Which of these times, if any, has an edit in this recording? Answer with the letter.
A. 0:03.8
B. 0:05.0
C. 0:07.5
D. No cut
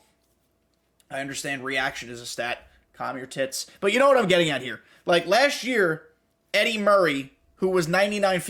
D